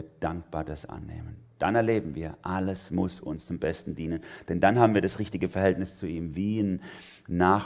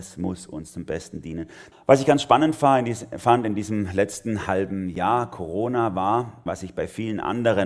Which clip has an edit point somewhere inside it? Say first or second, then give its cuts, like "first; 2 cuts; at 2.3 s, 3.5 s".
second; 2 cuts; at 1.7 s, 6.5 s